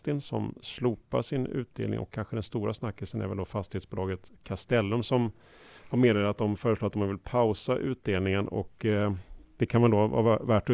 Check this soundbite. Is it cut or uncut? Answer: uncut